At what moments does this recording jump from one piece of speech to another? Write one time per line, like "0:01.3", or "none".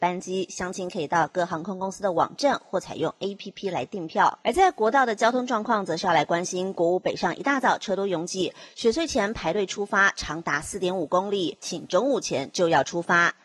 0:04.4
0:11.6